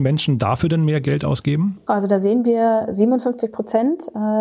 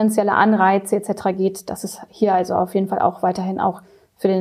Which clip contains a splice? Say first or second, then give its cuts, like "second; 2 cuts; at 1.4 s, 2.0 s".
first; 1 cut; at 1.9 s